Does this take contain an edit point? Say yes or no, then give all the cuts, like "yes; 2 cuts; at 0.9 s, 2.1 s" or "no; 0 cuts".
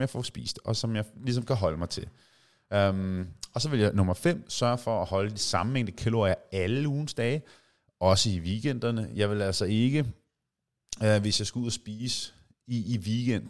no; 0 cuts